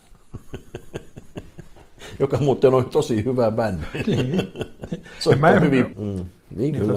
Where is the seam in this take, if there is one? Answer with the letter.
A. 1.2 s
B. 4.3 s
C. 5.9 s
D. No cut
C